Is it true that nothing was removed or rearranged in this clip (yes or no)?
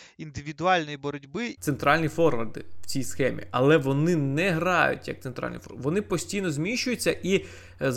no